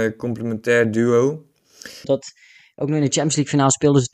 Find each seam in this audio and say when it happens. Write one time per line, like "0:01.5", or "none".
0:02.0